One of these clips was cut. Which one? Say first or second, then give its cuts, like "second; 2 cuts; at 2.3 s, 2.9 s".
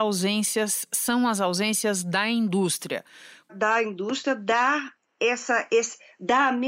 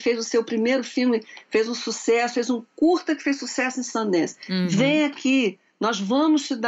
first; 1 cut; at 3.4 s